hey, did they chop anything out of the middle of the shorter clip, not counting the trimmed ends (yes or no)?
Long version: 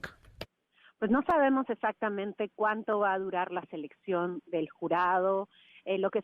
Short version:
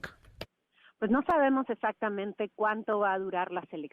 no